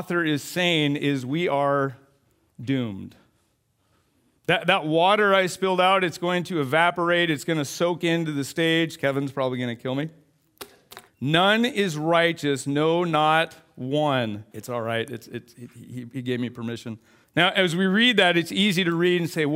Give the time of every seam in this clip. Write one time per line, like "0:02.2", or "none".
0:11.1
0:14.5
0:17.2